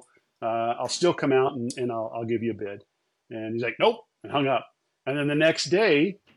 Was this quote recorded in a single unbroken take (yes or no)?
yes